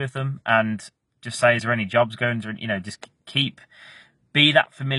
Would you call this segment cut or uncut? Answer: uncut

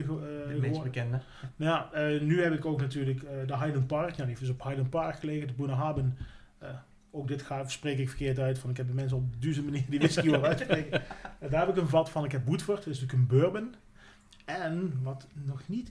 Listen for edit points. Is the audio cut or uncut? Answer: uncut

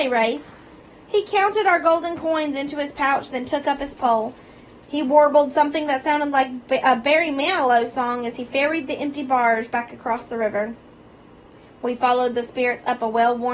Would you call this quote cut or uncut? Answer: uncut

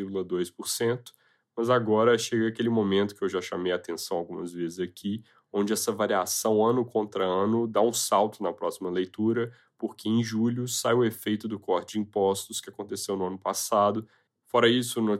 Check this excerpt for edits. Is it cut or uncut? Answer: cut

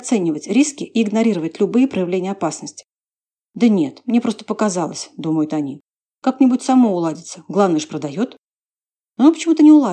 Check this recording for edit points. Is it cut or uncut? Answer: uncut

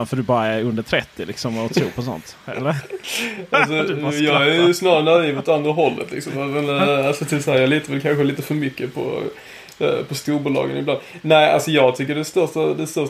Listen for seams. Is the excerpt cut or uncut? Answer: uncut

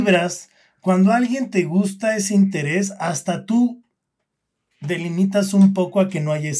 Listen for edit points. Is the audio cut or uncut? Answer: uncut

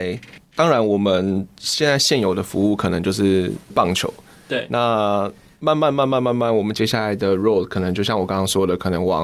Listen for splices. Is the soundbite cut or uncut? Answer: uncut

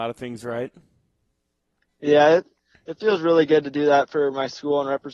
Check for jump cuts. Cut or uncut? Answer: uncut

